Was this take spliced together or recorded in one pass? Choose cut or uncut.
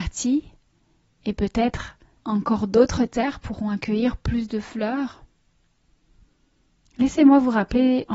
uncut